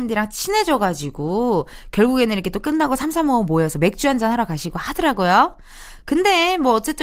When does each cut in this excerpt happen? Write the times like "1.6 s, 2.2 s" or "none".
none